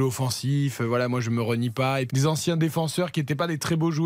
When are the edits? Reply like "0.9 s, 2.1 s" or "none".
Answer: 2.1 s